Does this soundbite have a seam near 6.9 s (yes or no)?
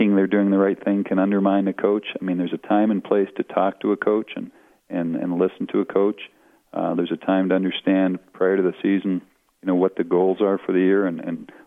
no